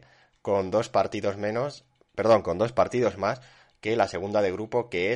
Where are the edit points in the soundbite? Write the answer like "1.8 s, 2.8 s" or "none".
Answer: none

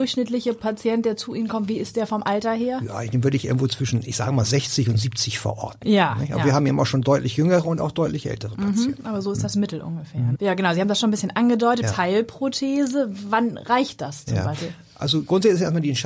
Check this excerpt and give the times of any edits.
10.4 s, 11.8 s

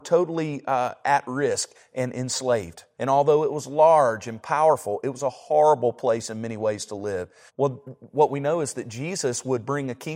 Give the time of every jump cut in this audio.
3.0 s, 7.5 s

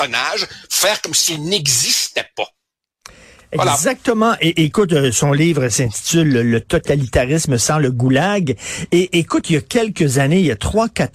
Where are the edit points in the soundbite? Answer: none

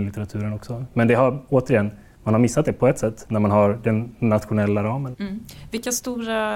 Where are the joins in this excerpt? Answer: 5.1 s

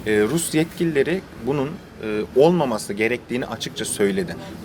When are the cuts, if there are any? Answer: none

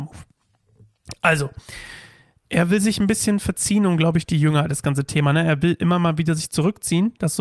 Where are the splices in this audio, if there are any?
4.7 s

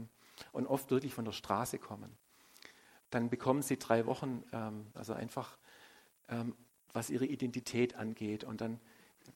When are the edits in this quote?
3.0 s, 4.9 s

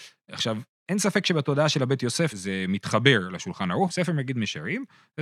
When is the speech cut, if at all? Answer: 2.3 s, 3.9 s

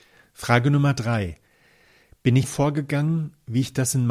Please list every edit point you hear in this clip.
2.4 s

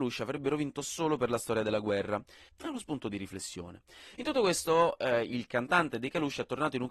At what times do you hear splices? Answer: 2.5 s

